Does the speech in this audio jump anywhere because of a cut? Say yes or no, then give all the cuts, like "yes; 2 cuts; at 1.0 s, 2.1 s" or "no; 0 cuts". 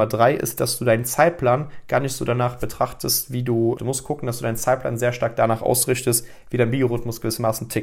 yes; 1 cut; at 3.8 s